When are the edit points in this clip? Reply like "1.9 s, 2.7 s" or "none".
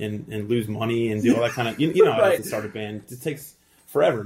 none